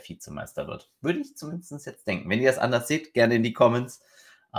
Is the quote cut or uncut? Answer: uncut